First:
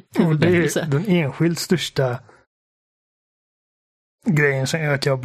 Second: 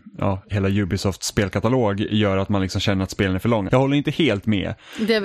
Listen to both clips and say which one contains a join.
second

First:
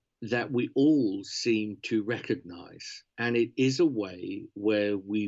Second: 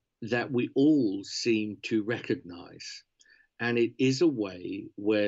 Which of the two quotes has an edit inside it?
first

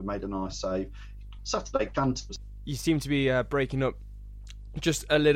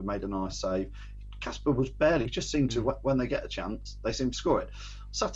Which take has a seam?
first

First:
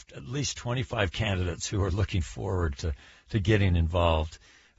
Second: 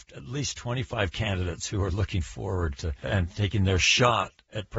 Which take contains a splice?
second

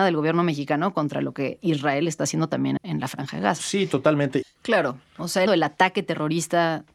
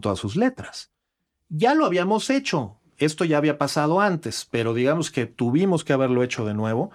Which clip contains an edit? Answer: first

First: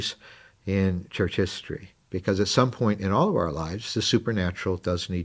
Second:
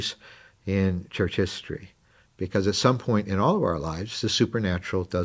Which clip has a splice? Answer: first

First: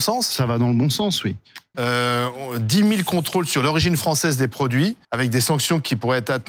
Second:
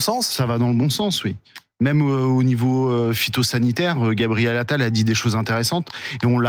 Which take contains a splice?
first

